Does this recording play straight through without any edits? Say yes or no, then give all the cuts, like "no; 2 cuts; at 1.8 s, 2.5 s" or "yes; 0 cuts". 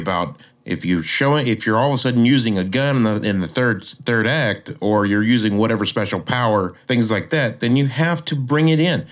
yes; 0 cuts